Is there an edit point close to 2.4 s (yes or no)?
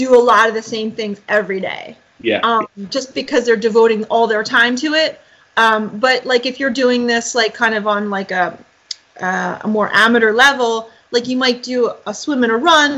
no